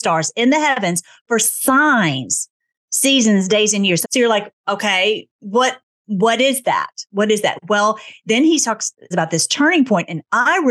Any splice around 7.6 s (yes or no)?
no